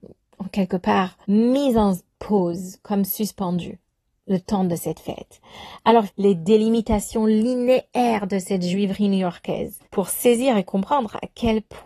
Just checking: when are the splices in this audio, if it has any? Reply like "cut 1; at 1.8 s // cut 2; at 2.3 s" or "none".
cut 1; at 1.2 s // cut 2; at 6.1 s // cut 3; at 9.8 s